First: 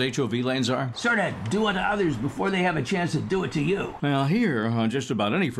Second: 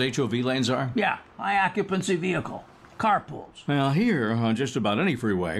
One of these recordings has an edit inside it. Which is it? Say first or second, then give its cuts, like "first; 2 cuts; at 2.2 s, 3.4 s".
first; 2 cuts; at 0.9 s, 4.0 s